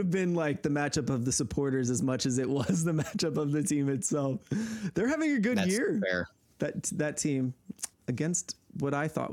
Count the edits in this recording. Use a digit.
1